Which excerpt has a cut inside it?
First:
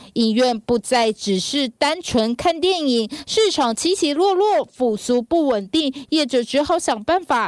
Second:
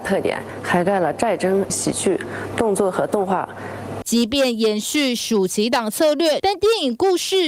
second; 3 cuts; at 1.7 s, 4.0 s, 6.4 s

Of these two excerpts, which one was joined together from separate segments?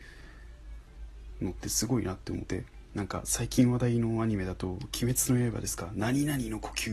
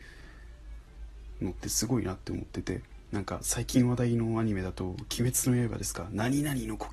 first; 1 cut; at 2.5 s

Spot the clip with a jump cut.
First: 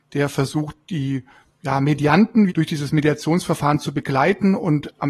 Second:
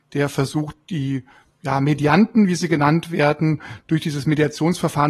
first; 1 cut; at 2.5 s

